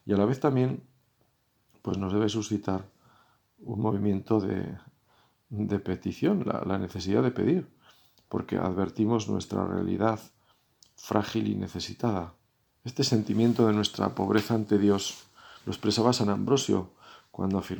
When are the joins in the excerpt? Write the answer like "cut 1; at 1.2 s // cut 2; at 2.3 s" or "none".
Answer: cut 1; at 12.7 s // cut 2; at 15.6 s

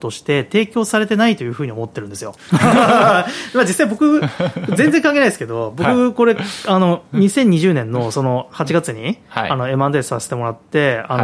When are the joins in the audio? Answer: cut 1; at 2.4 s

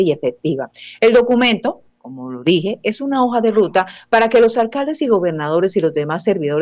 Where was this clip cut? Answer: none

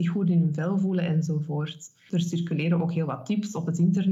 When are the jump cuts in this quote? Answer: cut 1; at 2.1 s

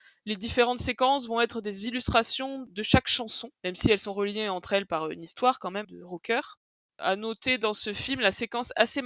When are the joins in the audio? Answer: cut 1; at 5.8 s

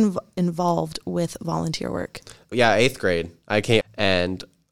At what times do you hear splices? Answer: cut 1; at 2.5 s // cut 2; at 3.8 s

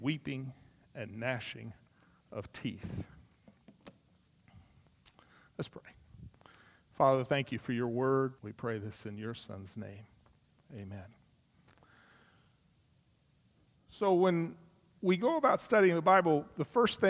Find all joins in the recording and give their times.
cut 1; at 8.4 s

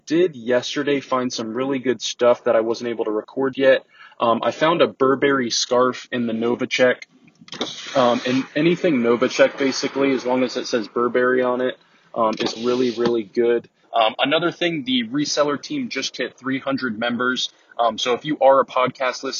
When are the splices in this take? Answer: cut 1; at 3.5 s // cut 2; at 12.6 s // cut 3; at 13.8 s

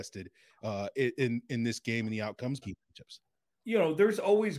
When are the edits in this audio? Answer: cut 1; at 2.6 s

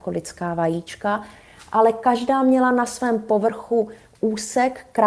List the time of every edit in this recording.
none

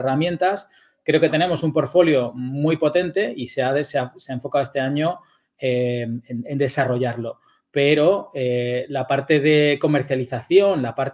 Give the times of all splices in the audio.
none

